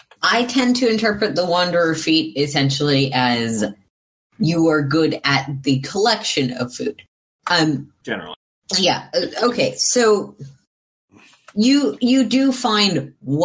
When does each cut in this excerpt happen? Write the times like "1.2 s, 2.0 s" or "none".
none